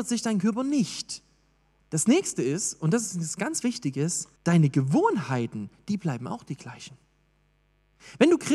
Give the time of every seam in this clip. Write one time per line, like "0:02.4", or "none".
0:01.8
0:04.4